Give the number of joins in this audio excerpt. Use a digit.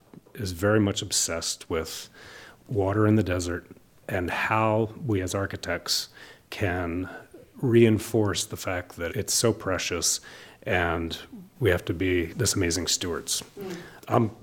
1